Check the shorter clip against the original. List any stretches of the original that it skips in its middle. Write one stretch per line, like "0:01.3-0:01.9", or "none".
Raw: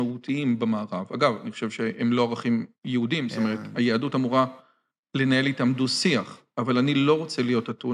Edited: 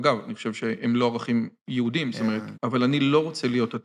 0:03.7-0:06.5